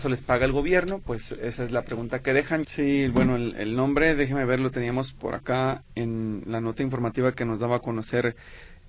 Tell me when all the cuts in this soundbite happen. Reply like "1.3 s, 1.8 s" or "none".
2.6 s